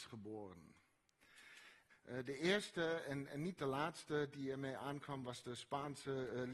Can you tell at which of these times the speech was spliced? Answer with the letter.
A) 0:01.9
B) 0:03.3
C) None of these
A